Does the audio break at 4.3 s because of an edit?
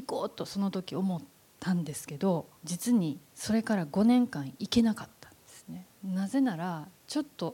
no; 2 cuts; at 2.6 s, 5.9 s

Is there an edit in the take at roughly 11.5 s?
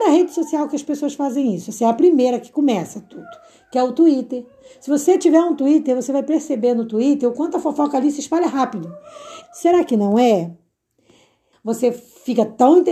yes; 2 cuts; at 9.4 s, 11.5 s

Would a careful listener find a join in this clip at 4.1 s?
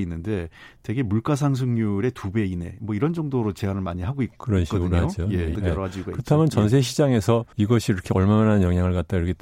no; 2 cuts; at 5.5 s, 7.5 s

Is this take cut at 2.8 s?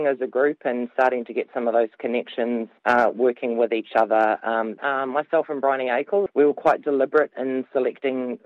no; 2 cuts; at 4.8 s, 6.3 s

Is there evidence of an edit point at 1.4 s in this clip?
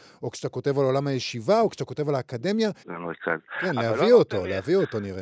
no; 1 cut; at 2.8 s

